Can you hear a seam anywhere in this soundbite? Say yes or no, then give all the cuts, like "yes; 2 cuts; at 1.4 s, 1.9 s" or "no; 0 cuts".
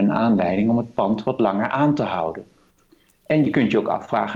no; 0 cuts